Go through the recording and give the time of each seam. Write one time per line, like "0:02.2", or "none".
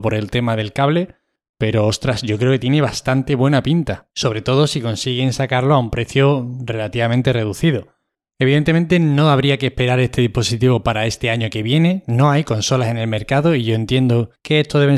0:04.1